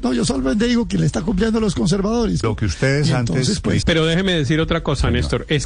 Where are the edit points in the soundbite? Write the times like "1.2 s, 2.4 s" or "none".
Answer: 2.4 s, 3.8 s